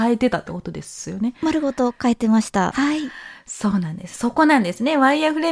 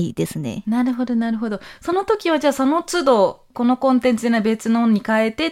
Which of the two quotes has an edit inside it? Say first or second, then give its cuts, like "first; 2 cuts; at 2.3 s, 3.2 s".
first; 1 cut; at 2.7 s